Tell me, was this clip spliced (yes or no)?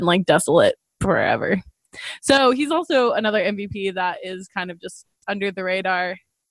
no